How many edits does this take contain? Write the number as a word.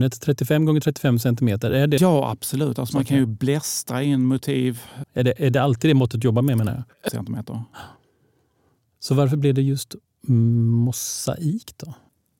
three